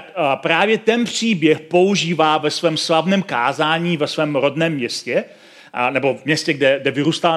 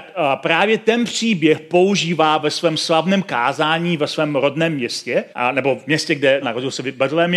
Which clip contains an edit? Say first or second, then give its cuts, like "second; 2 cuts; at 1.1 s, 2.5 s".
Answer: second; 2 cuts; at 5.3 s, 6.4 s